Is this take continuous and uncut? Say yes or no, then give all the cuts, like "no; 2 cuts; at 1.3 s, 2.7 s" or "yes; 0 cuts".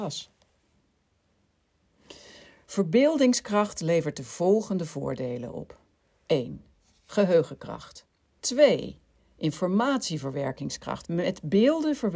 no; 2 cuts; at 8.4 s, 11.0 s